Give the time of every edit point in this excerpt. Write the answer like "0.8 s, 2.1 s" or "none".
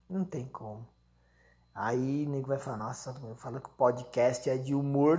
none